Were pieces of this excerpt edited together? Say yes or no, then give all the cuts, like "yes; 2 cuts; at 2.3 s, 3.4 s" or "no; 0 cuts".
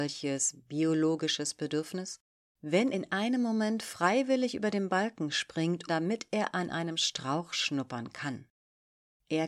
yes; 2 cuts; at 2.9 s, 5.9 s